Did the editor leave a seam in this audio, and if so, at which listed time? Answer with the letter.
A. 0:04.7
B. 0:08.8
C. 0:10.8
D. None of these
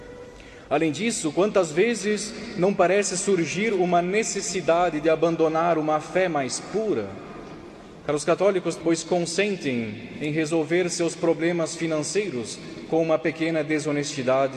B